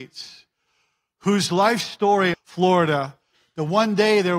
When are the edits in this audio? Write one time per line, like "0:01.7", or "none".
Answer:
0:02.3

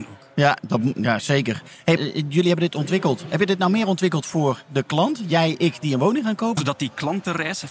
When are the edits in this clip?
0:02.0
0:06.6

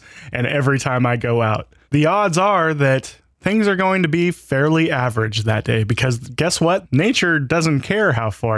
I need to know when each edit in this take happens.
0:01.8
0:06.8

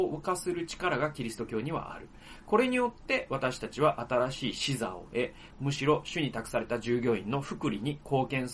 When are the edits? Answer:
0:05.5

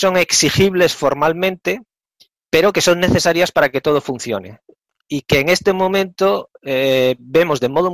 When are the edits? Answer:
none

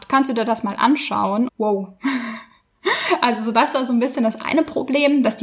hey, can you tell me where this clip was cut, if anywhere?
0:01.5

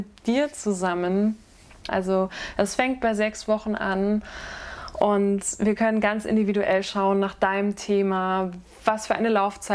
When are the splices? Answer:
0:01.9

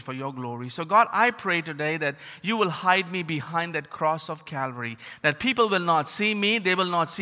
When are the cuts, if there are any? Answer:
none

